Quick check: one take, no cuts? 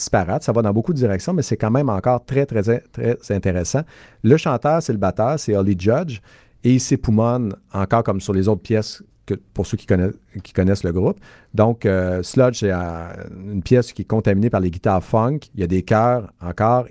yes; 0 cuts

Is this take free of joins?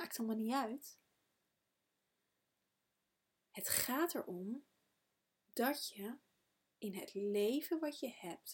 yes; 0 cuts

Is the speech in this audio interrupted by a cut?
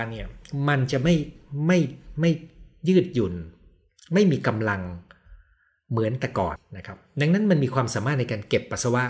yes; 1 cut; at 6.6 s

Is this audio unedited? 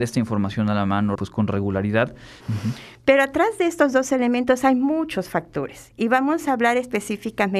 no; 2 cuts; at 1.2 s, 2.4 s

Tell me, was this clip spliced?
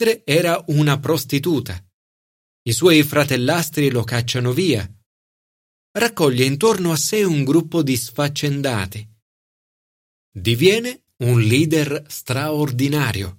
no; 0 cuts

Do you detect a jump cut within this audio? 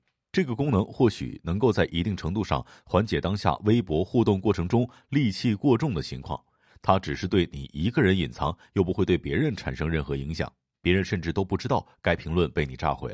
yes; 1 cut; at 6.7 s

